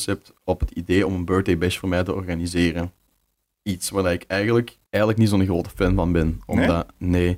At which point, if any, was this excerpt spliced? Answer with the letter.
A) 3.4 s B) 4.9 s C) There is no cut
B